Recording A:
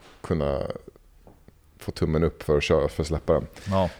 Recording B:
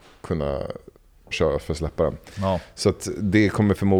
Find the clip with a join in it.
B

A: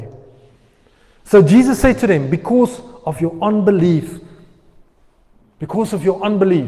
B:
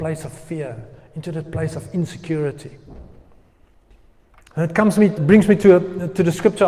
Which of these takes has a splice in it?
B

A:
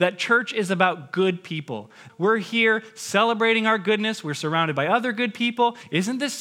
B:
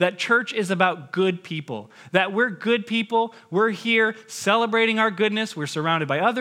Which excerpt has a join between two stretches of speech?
A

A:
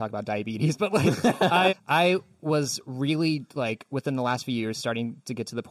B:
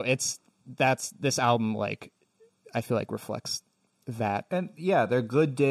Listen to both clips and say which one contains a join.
A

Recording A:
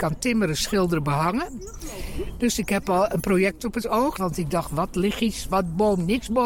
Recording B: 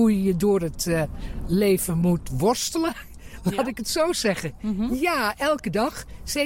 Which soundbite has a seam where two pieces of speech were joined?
A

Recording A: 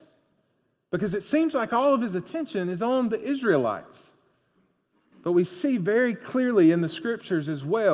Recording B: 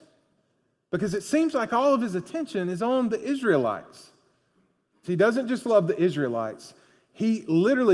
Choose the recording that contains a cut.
B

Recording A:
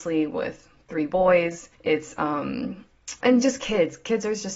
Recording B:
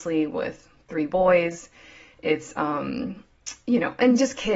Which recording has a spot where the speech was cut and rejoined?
A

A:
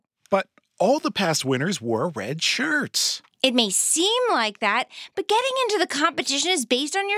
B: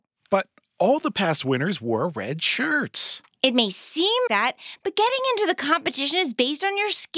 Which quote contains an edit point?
B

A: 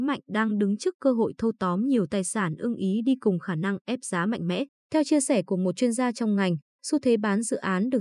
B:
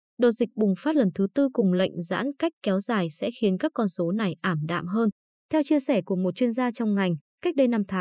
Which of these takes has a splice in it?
A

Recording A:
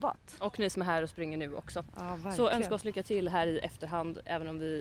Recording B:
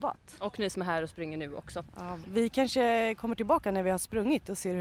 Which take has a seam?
B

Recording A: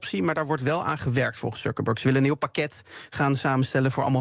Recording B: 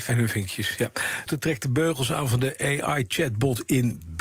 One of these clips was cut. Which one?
B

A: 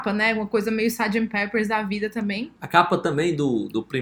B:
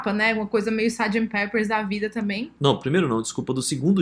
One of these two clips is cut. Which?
B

